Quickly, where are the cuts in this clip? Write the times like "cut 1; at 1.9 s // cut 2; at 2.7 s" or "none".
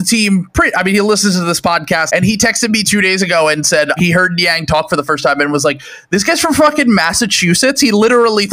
cut 1; at 2.1 s // cut 2; at 4.0 s